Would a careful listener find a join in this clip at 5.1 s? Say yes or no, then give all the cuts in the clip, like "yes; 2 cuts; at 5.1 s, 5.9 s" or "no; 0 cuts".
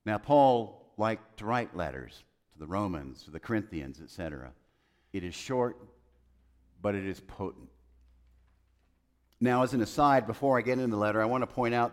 yes; 1 cut; at 5.1 s